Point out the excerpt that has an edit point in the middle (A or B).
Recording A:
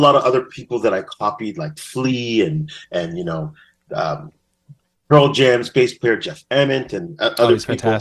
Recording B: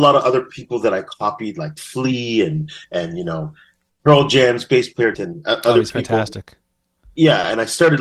B